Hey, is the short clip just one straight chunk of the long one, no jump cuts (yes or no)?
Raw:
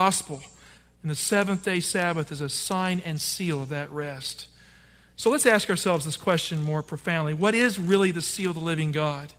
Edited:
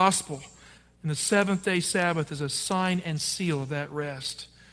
yes